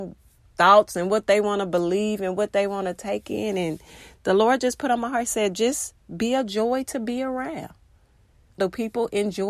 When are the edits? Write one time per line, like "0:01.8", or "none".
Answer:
0:08.6